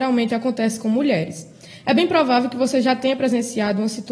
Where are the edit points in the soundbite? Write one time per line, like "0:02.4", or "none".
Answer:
none